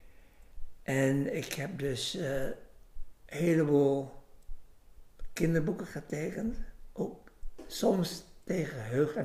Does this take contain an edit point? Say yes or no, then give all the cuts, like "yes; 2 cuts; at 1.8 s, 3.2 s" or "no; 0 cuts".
no; 0 cuts